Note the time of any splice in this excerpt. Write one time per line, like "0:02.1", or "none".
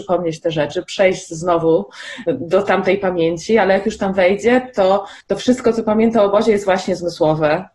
0:05.2